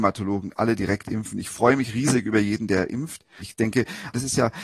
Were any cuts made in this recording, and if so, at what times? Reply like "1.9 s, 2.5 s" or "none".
3.4 s